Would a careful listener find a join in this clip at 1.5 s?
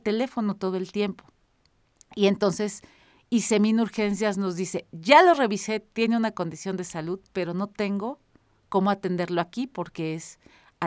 no; 0 cuts

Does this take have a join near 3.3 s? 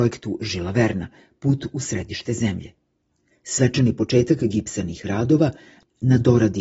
yes; 1 cut; at 3.3 s

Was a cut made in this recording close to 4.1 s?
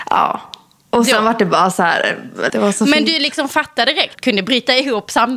yes; 2 cuts; at 2.5 s, 4.1 s

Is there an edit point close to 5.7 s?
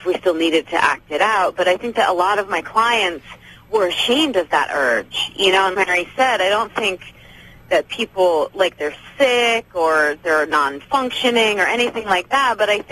yes; 1 cut; at 5.7 s

